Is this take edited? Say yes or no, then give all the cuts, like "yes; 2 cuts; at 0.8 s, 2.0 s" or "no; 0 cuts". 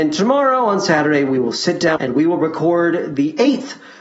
yes; 1 cut; at 2.0 s